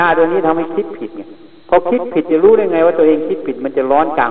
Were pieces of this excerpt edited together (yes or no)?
no